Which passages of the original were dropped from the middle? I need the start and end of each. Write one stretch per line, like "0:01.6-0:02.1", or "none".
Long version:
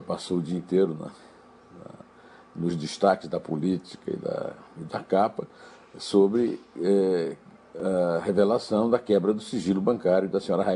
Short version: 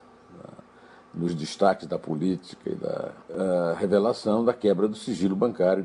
0:04.6-0:07.7